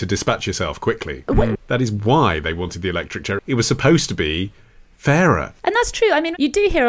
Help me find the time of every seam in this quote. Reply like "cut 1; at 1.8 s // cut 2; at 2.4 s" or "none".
cut 1; at 1.6 s // cut 2; at 3.4 s